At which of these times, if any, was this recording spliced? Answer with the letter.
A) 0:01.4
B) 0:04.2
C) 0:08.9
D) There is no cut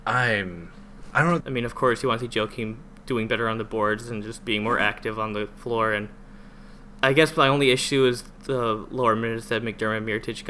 A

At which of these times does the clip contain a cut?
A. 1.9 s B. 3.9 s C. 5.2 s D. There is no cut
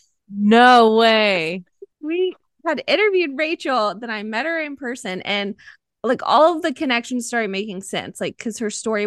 A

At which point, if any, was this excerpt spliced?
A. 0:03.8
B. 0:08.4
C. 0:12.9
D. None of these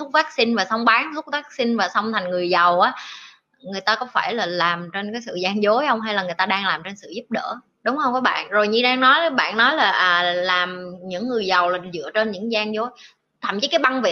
D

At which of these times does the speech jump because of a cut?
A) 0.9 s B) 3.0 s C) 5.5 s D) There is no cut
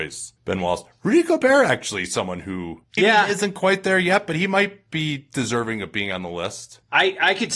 B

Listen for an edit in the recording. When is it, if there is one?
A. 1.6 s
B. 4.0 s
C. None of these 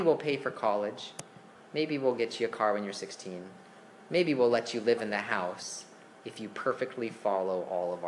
C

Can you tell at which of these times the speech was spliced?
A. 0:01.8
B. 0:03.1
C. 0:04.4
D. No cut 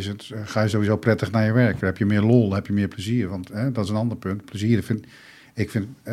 A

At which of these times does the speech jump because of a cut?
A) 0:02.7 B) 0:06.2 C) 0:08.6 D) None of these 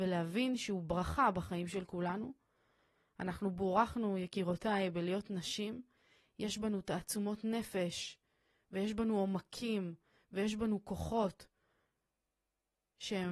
D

